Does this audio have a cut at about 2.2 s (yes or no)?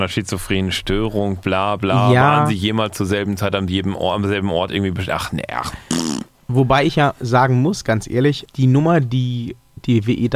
no